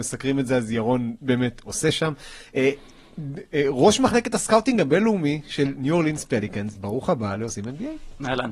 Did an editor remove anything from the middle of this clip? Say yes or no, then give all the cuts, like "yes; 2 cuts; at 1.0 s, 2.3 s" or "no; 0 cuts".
yes; 1 cut; at 6.8 s